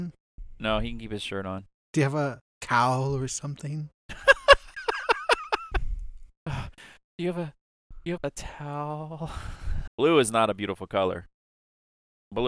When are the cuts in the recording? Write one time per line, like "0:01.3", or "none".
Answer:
0:08.2
0:09.9